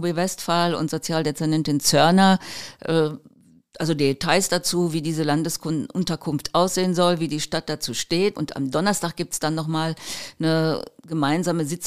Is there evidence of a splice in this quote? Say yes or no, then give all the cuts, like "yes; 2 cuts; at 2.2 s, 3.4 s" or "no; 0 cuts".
yes; 1 cut; at 8.3 s